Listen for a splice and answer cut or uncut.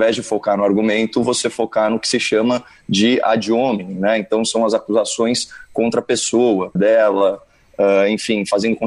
cut